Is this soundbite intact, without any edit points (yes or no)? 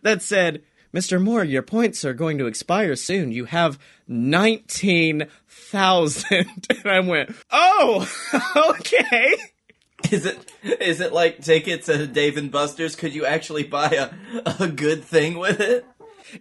no